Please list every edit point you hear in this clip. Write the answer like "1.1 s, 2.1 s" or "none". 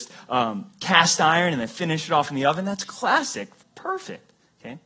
none